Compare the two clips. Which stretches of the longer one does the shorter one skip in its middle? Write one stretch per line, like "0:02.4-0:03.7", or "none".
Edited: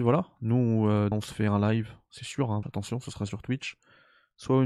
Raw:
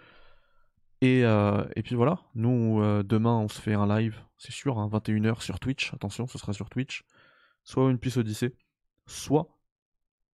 0:03.1-0:03.4
0:04.9-0:05.9